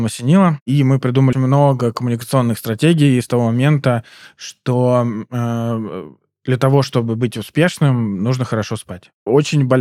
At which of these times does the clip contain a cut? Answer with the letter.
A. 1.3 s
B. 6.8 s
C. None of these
A